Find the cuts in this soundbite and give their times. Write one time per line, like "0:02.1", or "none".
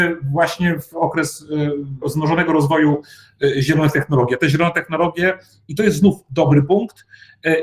0:02.0